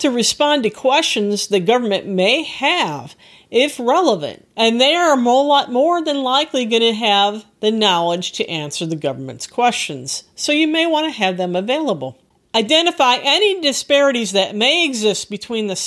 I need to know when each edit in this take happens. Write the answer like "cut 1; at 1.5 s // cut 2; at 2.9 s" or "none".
cut 1; at 4.5 s